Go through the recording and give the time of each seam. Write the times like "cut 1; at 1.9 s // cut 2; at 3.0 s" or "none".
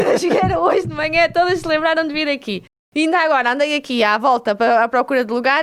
cut 1; at 2.8 s